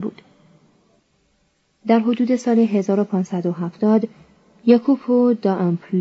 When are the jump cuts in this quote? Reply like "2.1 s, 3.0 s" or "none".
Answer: 1.7 s